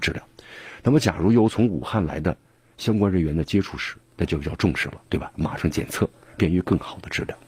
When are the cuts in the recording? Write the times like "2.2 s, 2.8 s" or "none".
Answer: none

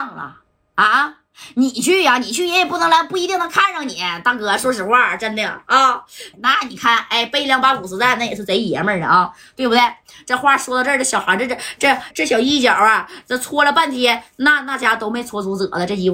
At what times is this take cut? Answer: 6.3 s, 12.1 s

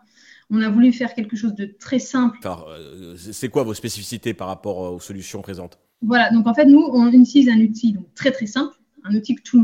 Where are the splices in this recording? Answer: 2.4 s

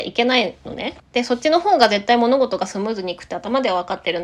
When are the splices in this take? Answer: 1.0 s

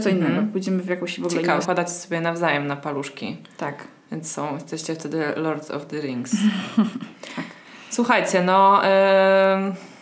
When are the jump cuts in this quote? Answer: 1.6 s

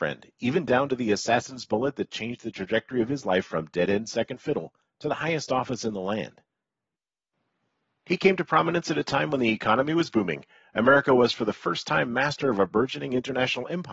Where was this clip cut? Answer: none

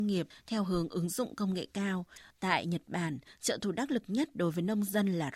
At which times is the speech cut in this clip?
2.3 s

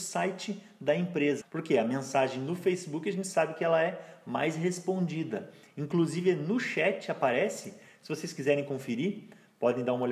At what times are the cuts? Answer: 1.4 s

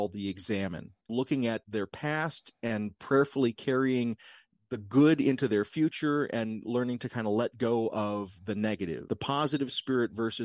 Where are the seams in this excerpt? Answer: 1.0 s

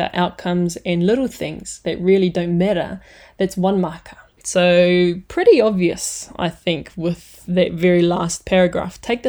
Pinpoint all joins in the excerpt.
4.4 s

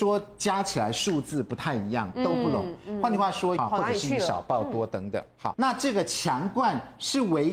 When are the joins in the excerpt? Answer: 3.6 s, 5.5 s

